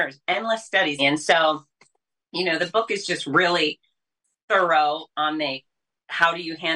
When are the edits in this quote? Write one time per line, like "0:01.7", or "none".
0:01.0